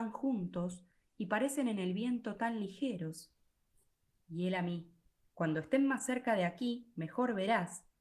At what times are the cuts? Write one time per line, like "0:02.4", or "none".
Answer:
none